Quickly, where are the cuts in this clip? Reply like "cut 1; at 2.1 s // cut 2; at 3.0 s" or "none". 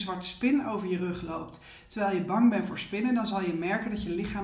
none